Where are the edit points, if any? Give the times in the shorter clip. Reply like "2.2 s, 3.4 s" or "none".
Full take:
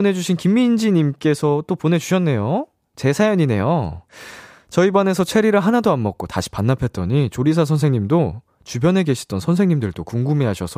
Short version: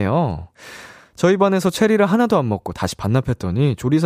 none